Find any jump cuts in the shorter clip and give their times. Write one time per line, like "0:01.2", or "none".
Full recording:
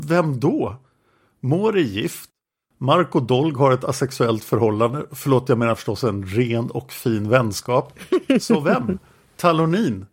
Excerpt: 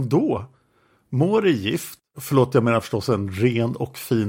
0:02.1